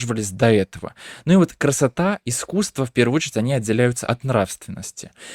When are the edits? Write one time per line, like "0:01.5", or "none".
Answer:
none